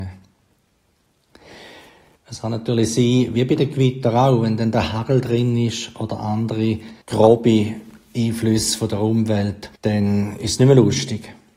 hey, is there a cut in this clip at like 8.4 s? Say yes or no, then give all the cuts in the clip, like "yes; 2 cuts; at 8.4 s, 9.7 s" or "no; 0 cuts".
no; 3 cuts; at 2.2 s, 7.0 s, 9.8 s